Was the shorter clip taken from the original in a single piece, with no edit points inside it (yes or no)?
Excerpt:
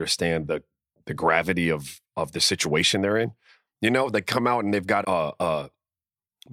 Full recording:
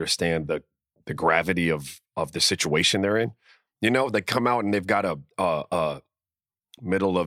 no